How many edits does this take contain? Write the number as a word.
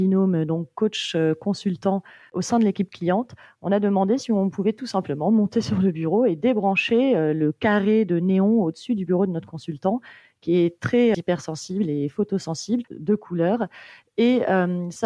two